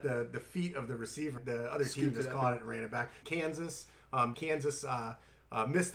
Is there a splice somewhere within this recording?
yes; 3 cuts; at 1.4 s, 3.2 s, 4.3 s

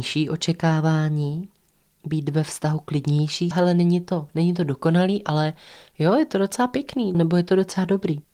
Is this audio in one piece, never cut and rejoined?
no; 2 cuts; at 3.5 s, 7.1 s

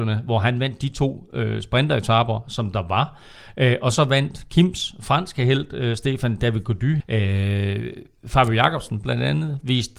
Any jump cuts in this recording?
yes; 1 cut; at 7.0 s

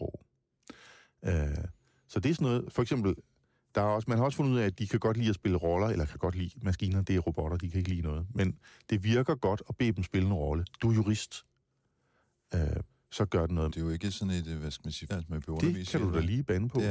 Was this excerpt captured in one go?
no; 2 cuts; at 13.7 s, 15.1 s

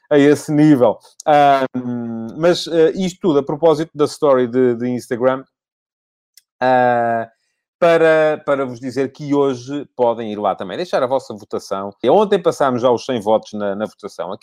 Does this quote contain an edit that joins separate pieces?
yes; 1 cut; at 12.0 s

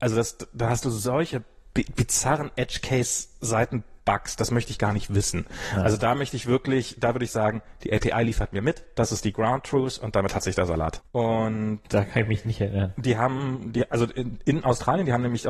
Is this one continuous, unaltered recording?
no; 1 cut; at 11.0 s

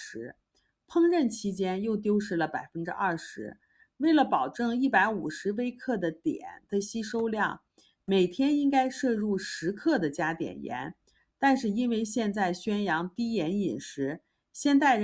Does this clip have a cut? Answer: no; 0 cuts

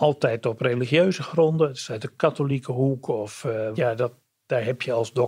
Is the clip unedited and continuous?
no; 1 cut; at 3.8 s

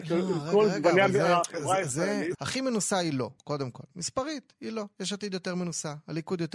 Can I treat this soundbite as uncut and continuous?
no; 1 cut; at 2.3 s

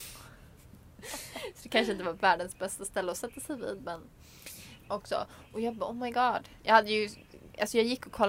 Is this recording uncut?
no; 1 cut; at 4.8 s

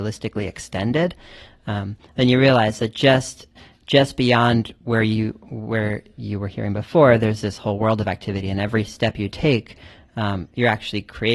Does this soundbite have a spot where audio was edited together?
no; 0 cuts

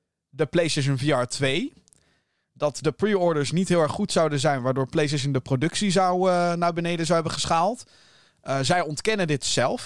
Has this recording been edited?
no; 0 cuts

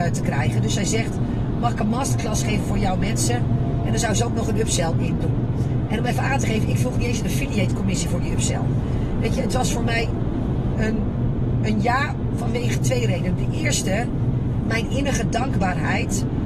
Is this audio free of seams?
no; 1 cut; at 10.7 s

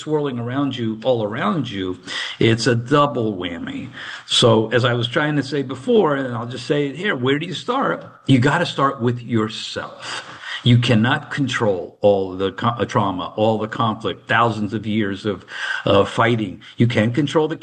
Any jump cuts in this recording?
no; 0 cuts

